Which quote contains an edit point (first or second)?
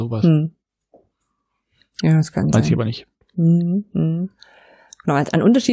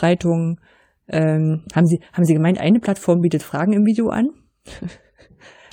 first